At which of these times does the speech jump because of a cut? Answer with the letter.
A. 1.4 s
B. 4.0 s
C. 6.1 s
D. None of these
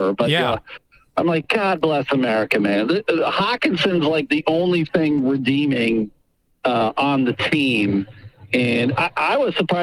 D